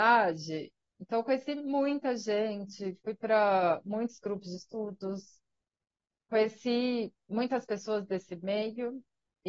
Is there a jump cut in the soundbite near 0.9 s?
no; 1 cut; at 3.0 s

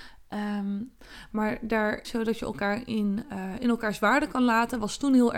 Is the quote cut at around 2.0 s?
yes; 1 cut; at 2.0 s

